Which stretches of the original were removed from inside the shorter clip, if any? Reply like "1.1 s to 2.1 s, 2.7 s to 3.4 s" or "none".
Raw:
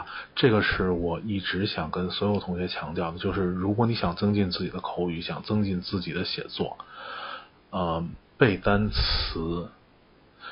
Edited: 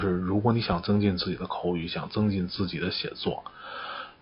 none